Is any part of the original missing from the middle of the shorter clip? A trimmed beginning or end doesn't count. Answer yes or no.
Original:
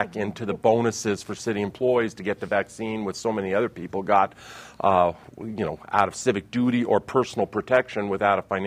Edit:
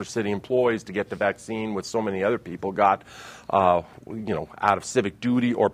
no